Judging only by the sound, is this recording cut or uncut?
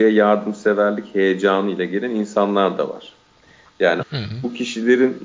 cut